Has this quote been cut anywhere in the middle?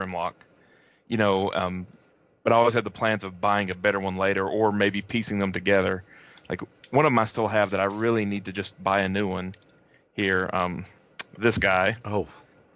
no; 0 cuts

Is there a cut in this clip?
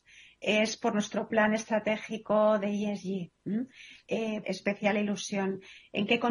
yes; 1 cut; at 4.4 s

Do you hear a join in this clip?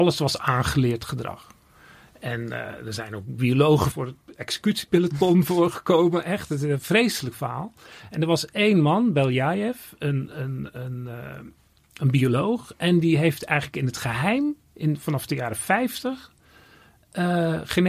yes; 1 cut; at 3.9 s

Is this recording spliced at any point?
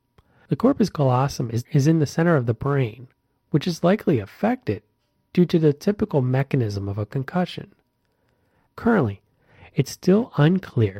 yes; 1 cut; at 8.7 s

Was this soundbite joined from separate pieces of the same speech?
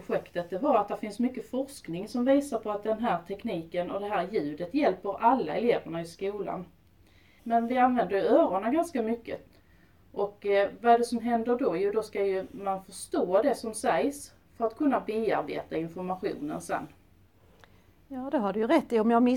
yes; 1 cut; at 7.4 s

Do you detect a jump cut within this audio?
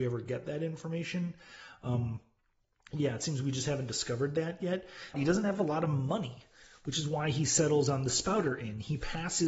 yes; 1 cut; at 5.1 s

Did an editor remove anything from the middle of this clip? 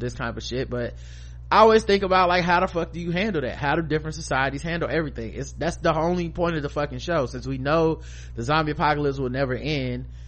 no; 0 cuts

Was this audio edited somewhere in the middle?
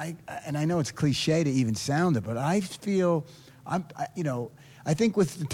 no; 0 cuts

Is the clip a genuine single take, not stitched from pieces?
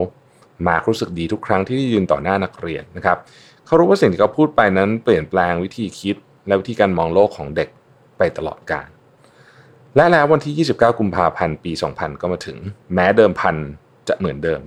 no; 1 cut; at 12.8 s

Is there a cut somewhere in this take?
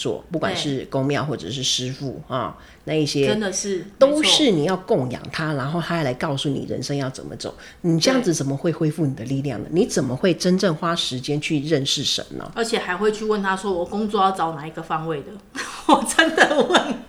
no; 0 cuts

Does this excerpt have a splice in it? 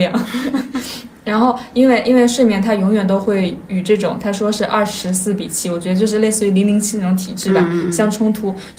no; 0 cuts

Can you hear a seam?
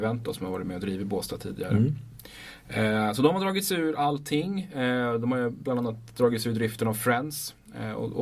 no; 0 cuts

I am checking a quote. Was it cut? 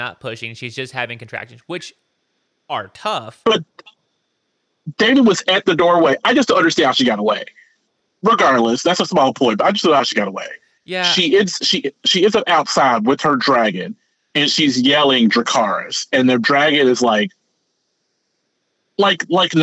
no; 0 cuts

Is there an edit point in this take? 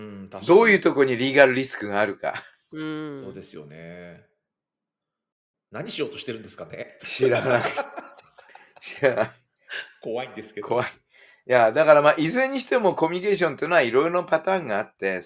no; 0 cuts

